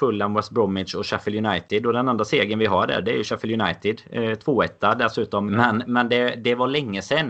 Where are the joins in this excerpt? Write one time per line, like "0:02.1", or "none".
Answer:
0:05.5